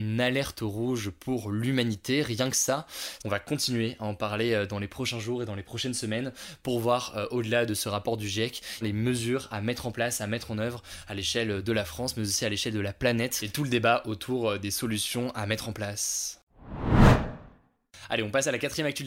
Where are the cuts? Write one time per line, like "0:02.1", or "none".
0:03.2
0:08.8

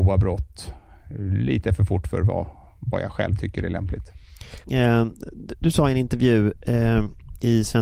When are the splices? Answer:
0:04.6

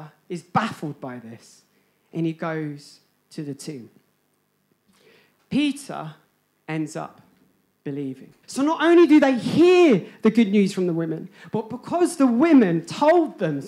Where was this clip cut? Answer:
0:08.4

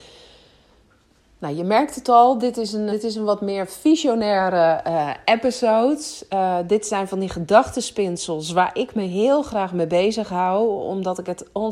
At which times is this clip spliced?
0:02.9

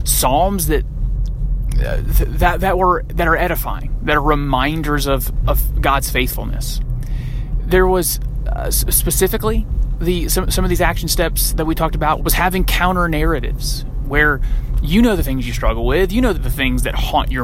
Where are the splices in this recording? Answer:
0:12.2
0:16.3

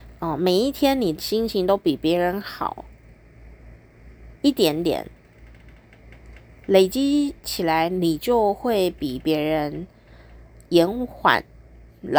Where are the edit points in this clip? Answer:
none

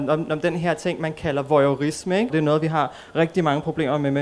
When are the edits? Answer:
0:02.3

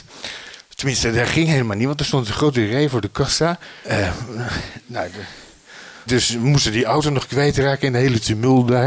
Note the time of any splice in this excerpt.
0:03.8
0:06.1

